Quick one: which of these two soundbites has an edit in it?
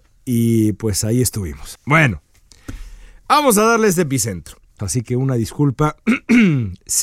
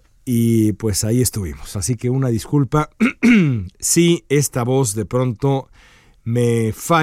first; 2 cuts; at 1.7 s, 4.8 s

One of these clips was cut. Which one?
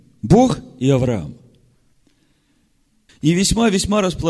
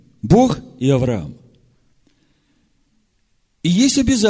first; 1 cut; at 3.1 s

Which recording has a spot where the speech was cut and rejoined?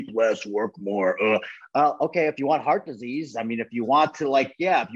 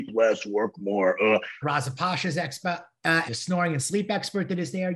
second; 2 cuts; at 1.6 s, 3.2 s

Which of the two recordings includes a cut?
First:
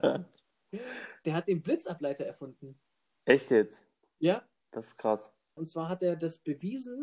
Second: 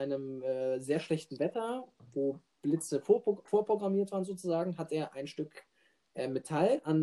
first; 1 cut; at 5.6 s

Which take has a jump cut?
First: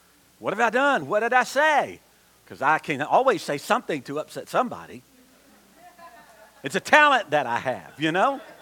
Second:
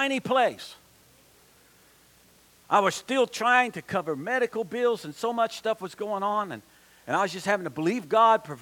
first; 1 cut; at 1.0 s

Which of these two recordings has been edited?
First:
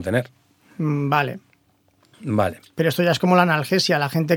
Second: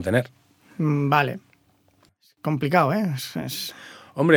second; 1 cut; at 2.1 s

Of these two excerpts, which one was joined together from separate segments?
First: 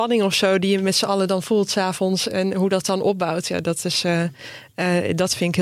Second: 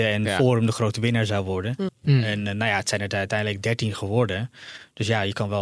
second; 1 cut; at 1.9 s

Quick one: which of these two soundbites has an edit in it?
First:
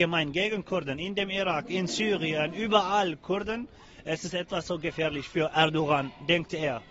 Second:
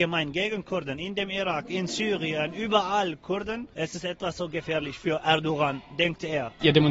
second; 1 cut; at 3.7 s

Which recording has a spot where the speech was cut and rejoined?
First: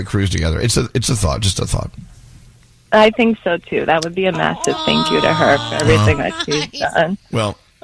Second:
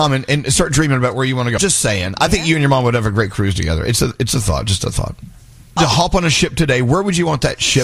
second; 2 cuts; at 1.6 s, 5.8 s

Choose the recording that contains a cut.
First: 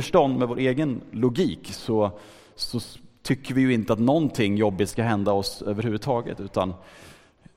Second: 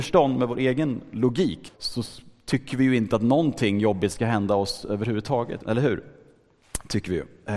second; 2 cuts; at 1.7 s, 5.6 s

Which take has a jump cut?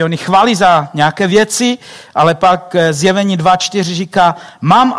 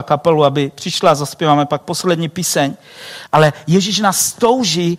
second; 1 cut; at 3.3 s

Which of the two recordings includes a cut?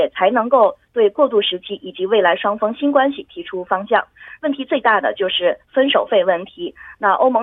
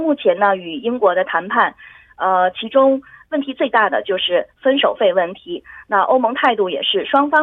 first; 1 cut; at 4.4 s

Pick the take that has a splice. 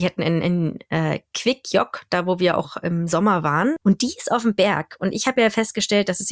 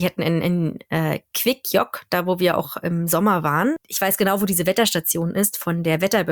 first; 1 cut; at 3.8 s

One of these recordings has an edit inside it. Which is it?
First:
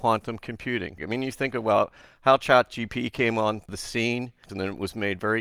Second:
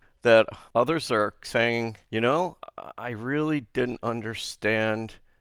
first; 2 cuts; at 1.0 s, 4.5 s

